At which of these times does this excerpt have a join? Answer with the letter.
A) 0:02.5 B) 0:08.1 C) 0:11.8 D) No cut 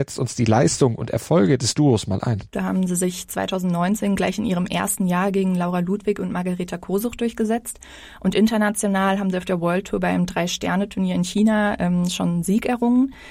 A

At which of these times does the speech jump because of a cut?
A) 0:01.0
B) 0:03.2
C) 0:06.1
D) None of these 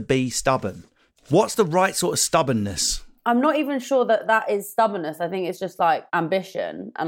C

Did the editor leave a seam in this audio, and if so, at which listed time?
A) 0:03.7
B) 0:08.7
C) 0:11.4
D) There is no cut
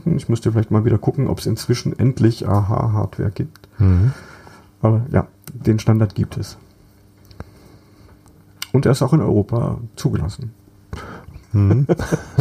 C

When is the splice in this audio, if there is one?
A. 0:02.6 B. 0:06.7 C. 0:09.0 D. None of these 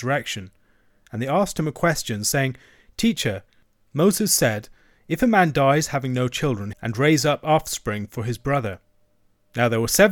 B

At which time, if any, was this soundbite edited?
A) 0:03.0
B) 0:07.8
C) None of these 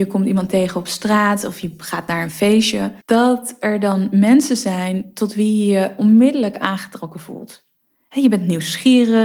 A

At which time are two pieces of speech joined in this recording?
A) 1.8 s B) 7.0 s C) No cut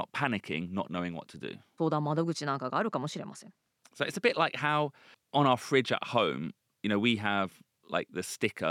A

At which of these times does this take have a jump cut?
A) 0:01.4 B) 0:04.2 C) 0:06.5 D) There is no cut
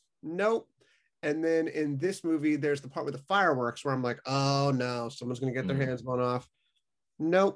D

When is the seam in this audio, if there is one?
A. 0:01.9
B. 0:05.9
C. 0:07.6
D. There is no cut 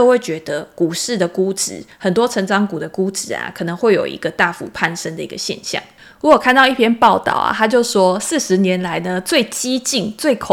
D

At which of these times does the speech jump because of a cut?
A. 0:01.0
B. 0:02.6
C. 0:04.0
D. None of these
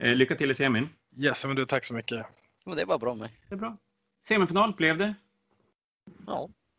B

